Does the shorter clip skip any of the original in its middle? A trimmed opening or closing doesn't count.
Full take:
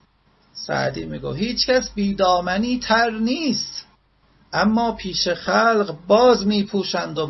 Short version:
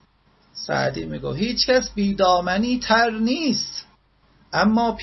no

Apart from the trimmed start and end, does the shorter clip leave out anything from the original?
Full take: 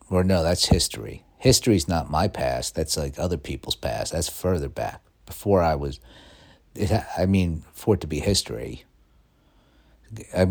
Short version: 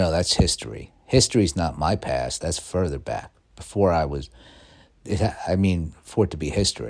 yes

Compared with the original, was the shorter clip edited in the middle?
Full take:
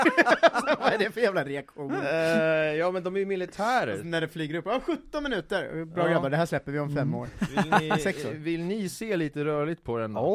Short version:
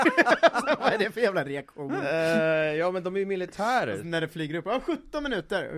no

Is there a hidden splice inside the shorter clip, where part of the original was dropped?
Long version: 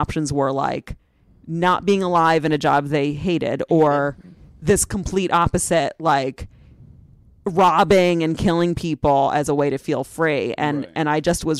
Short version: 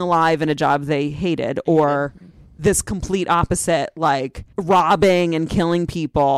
yes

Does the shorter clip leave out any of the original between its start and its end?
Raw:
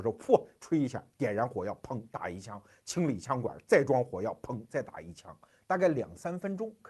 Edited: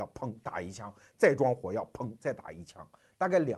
yes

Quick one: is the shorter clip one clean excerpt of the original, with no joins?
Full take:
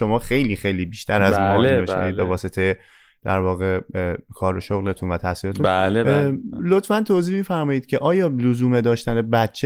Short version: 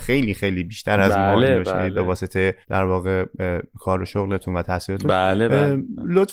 no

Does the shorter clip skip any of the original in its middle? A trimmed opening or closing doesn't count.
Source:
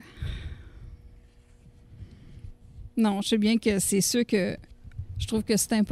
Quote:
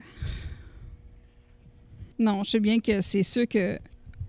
yes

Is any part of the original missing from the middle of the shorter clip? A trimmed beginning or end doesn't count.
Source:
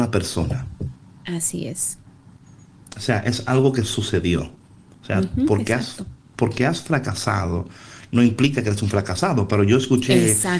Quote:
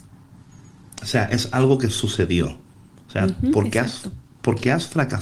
no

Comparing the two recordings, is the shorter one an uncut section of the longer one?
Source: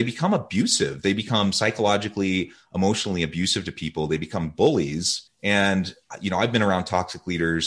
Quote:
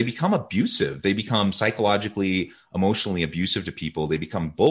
yes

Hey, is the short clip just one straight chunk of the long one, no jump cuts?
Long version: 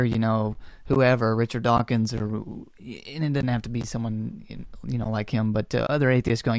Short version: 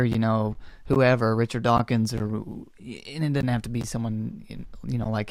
yes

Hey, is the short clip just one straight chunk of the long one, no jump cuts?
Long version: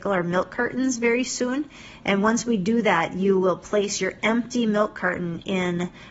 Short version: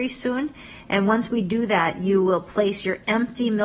yes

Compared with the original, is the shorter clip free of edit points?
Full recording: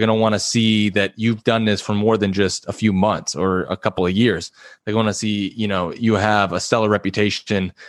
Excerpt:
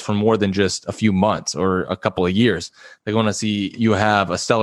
no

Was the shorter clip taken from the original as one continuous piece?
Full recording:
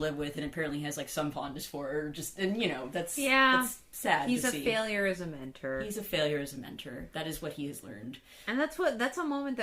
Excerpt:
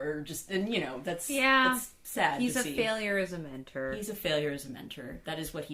yes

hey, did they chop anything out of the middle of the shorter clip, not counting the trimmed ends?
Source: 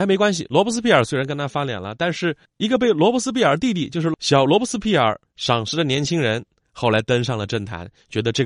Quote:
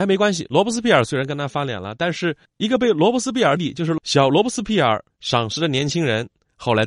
yes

